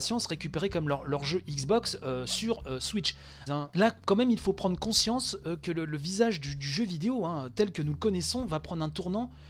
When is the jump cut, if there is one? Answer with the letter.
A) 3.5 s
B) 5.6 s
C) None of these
A